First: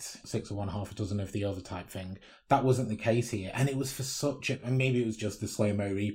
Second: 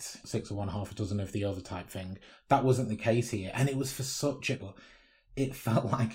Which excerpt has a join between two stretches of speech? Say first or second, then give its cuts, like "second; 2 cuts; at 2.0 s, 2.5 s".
second; 1 cut; at 4.6 s